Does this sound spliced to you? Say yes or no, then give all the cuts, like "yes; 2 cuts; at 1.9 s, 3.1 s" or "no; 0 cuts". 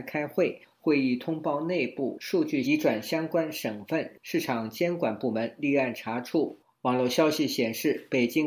yes; 1 cut; at 2.6 s